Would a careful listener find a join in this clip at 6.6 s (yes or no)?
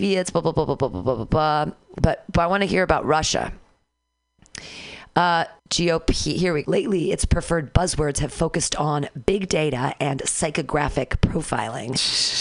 yes